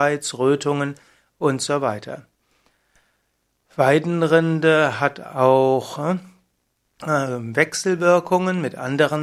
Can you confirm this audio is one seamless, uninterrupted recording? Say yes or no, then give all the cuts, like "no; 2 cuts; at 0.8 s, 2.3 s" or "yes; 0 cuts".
yes; 0 cuts